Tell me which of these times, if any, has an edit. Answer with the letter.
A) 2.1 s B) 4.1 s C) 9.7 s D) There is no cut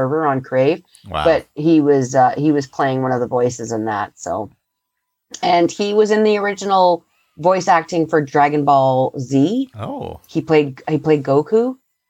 D